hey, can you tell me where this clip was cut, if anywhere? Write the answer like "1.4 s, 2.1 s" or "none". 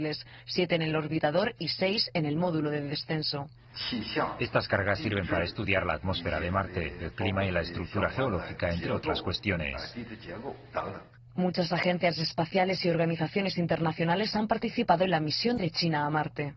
none

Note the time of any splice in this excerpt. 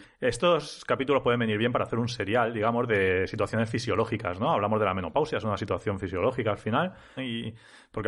7.2 s

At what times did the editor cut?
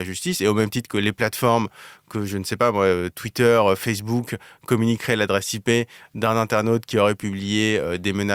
none

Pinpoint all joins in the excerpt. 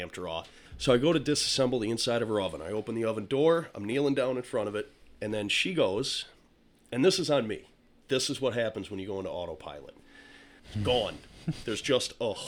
10.6 s

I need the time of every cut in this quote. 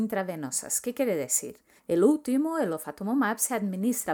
1.8 s

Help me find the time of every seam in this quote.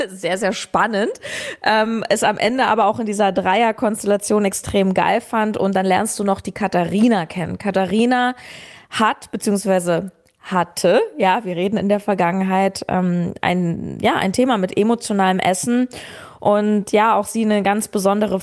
none

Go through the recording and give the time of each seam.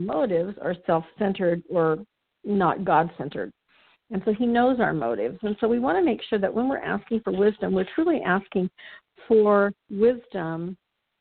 4.1 s

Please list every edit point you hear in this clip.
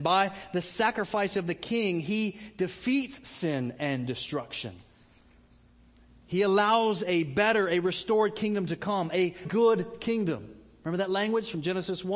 9.4 s

